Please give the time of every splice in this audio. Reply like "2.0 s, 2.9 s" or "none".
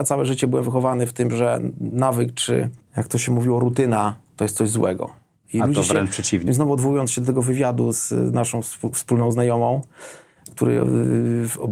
6.5 s